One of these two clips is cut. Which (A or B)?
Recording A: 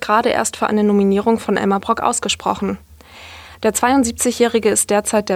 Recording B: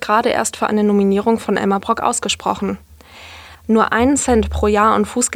B